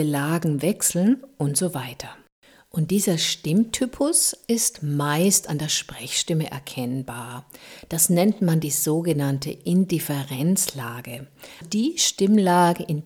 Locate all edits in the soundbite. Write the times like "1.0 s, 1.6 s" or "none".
11.6 s